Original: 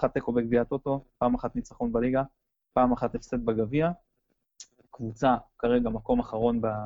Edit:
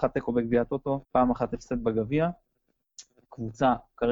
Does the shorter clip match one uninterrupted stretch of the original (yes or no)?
no